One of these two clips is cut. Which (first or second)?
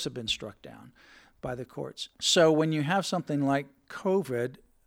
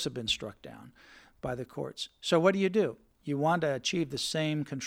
first